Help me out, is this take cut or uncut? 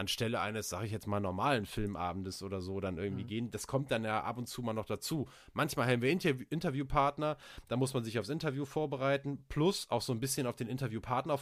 uncut